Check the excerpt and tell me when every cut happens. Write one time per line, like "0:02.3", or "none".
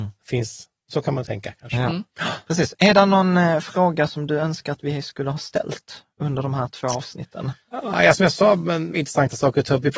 0:07.6
0:08.9